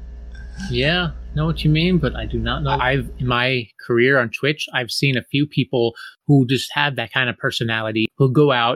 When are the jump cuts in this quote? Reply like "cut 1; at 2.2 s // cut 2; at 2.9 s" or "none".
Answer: cut 1; at 2.8 s